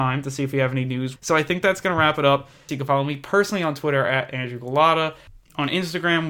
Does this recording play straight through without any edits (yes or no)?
no